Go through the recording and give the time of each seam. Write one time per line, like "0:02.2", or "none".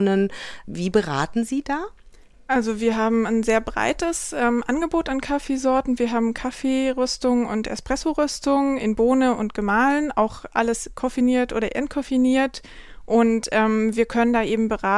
none